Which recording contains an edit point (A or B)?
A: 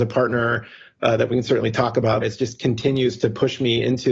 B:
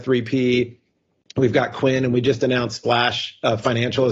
A